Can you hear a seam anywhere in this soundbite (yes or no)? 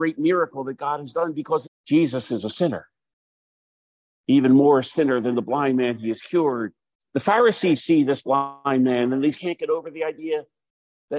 yes